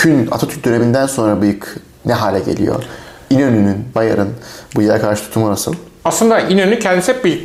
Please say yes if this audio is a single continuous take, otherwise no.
no